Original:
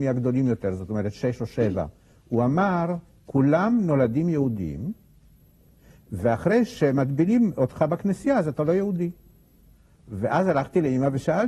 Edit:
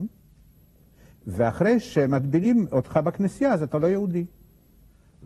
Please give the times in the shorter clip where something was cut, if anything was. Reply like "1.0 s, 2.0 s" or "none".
none

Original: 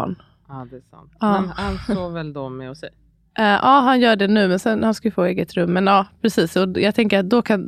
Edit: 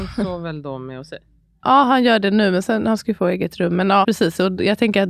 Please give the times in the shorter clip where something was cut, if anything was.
1.6 s, 4.0 s

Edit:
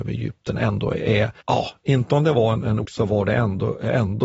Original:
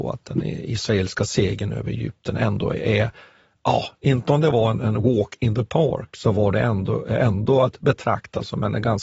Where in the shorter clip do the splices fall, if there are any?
1.4 s, 2.8 s

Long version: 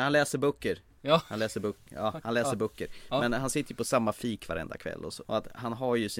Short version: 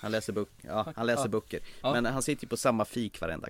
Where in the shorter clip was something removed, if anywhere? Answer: none

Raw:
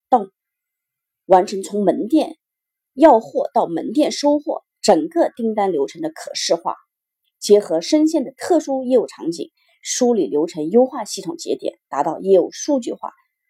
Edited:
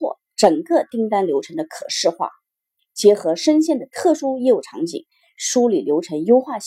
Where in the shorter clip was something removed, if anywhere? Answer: none

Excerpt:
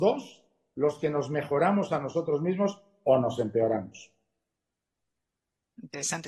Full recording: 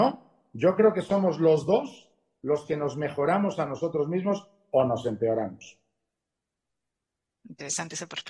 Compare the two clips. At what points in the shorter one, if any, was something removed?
none

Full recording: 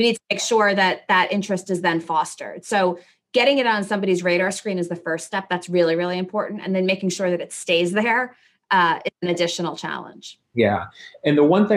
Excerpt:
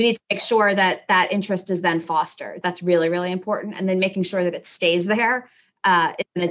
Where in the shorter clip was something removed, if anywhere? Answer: 2.6 s

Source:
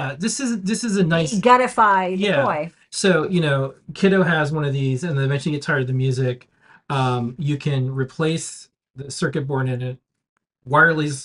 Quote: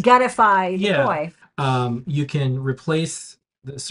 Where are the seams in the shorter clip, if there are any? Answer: 1.4 s

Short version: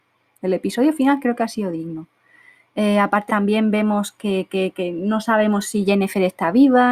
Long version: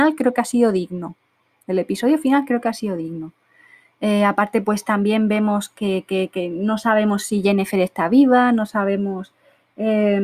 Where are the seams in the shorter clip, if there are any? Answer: 3.3 s

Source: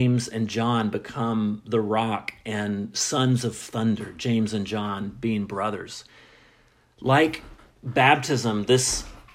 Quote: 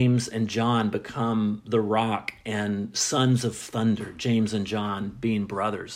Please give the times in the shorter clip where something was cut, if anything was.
none

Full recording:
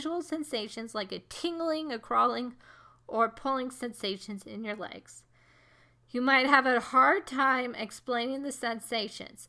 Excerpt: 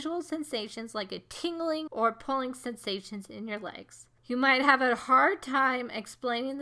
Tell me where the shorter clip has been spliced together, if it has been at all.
1.9 s, 4.2 s

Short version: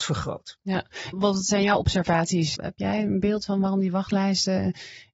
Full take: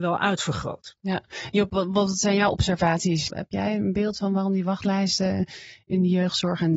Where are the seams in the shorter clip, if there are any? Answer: 1.1 s

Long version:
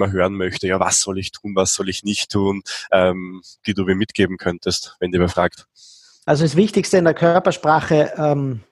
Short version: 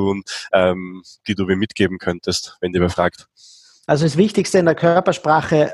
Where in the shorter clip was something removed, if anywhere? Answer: none

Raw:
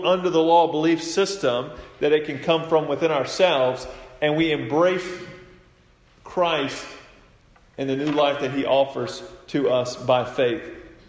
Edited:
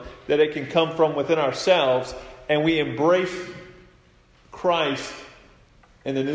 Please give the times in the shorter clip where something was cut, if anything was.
none

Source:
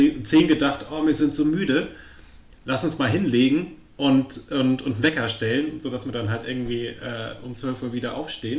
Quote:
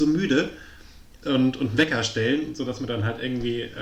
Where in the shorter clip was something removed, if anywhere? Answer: 1.2 s

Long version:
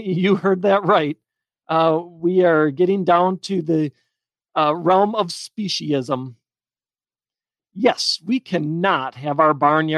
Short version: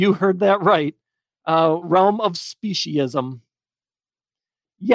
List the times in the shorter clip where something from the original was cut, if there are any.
1.8 s

